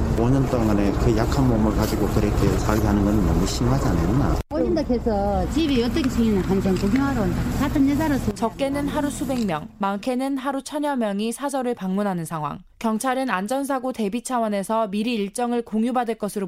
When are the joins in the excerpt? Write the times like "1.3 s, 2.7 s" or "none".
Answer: 12.7 s

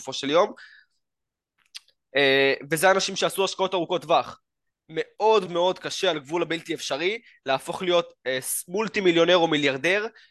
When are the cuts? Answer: 5.5 s

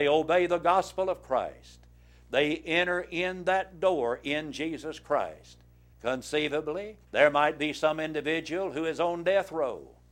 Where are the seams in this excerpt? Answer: 5.9 s, 7.1 s

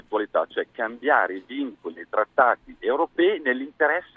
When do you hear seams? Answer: none

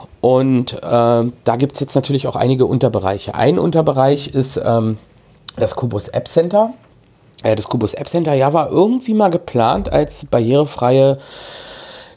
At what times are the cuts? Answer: none

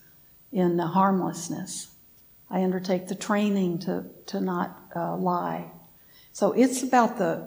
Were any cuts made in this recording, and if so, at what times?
none

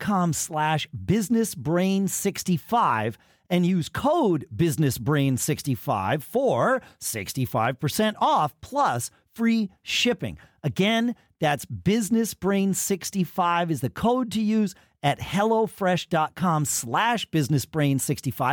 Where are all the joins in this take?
none

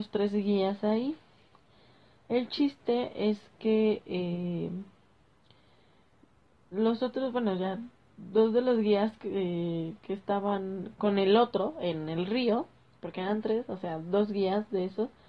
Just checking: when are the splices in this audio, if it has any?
10.9 s

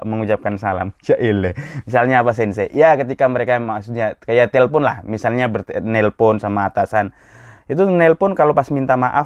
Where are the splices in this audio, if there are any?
none

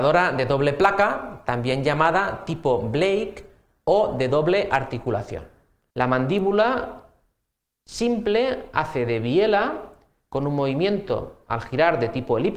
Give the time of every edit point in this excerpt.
5.9 s

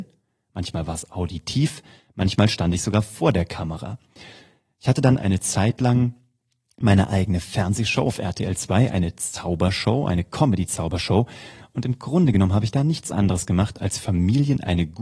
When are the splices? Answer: none

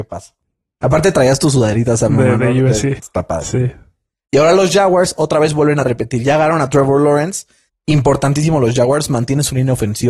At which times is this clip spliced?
3.0 s

